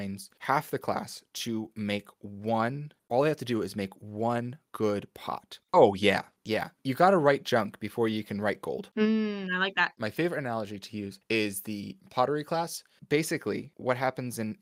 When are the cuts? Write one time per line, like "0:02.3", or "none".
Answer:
0:05.6